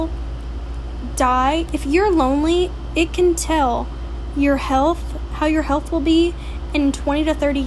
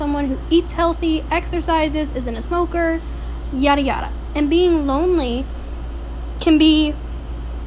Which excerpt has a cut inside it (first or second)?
first